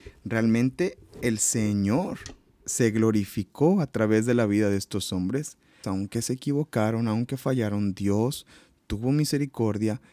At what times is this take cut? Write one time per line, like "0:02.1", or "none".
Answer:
0:05.8